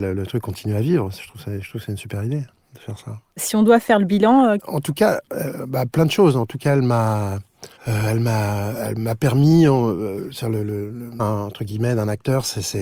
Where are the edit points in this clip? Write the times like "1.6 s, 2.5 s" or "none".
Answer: 4.6 s, 7.8 s, 11.2 s